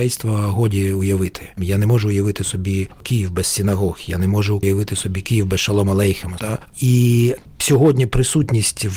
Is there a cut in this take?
yes; 2 cuts; at 1.6 s, 6.4 s

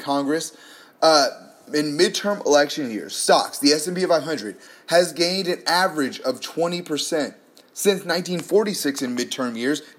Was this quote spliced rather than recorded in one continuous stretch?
no; 0 cuts

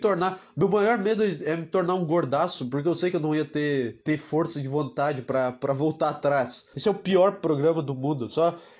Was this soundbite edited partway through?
yes; 2 cuts; at 4.0 s, 6.7 s

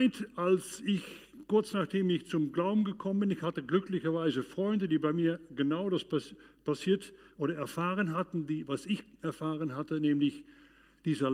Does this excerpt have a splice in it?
no; 0 cuts

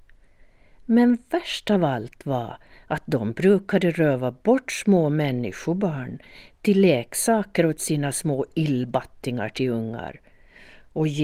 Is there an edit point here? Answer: no; 0 cuts

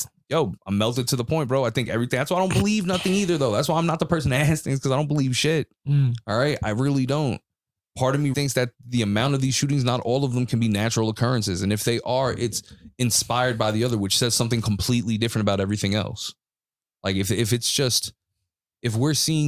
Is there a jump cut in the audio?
yes; 1 cut; at 8.3 s

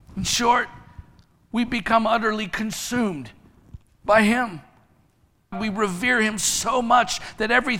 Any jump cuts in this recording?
yes; 1 cut; at 5.5 s

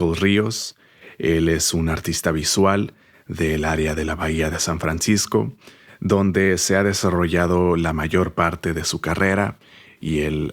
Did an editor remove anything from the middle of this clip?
no; 0 cuts

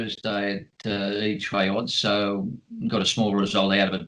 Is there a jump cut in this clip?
no; 0 cuts

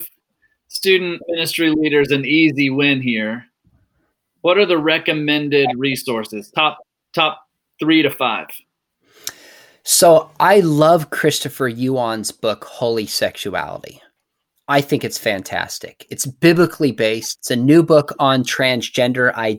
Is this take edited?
yes; 1 cut; at 17.4 s

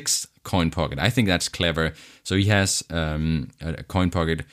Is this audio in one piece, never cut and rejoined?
yes; 0 cuts

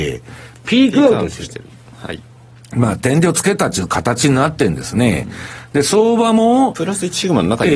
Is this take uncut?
yes; 0 cuts

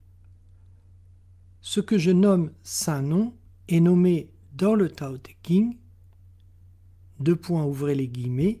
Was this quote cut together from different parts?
no; 0 cuts

